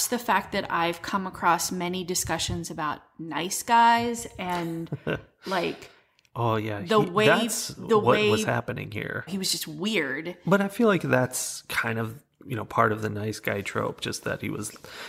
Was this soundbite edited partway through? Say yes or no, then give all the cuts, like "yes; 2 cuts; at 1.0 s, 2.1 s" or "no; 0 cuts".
yes; 1 cut; at 9.3 s